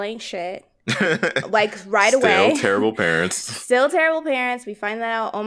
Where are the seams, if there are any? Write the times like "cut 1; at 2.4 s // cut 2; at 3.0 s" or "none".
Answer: none